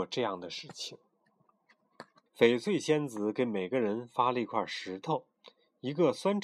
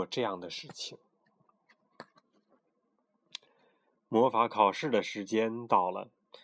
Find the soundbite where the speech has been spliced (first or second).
first